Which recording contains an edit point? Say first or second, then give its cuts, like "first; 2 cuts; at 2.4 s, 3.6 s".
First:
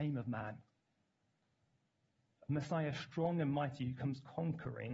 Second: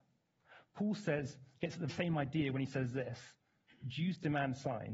second; 1 cut; at 1.9 s